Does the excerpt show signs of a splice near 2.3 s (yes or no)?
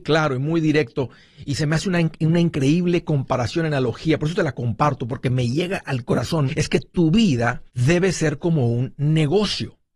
no